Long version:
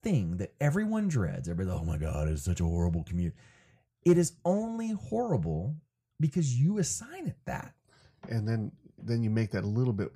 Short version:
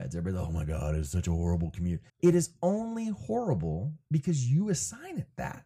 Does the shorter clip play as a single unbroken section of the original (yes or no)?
no